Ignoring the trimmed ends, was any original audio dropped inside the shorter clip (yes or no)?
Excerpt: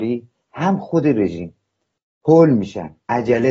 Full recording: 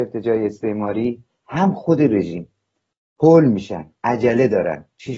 no